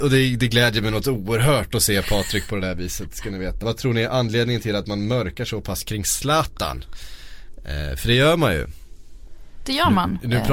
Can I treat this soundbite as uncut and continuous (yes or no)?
no